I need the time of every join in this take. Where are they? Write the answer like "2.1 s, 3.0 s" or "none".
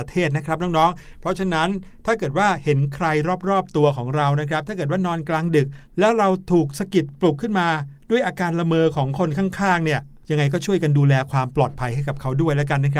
none